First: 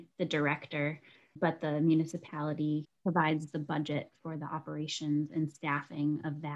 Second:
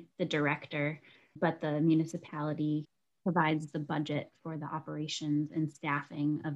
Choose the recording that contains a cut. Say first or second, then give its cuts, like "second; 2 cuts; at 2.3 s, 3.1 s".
first; 1 cut; at 3.0 s